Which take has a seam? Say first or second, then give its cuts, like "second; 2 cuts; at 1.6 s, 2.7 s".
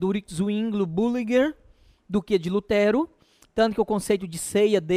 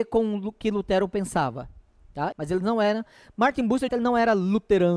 second; 2 cuts; at 2.3 s, 3.9 s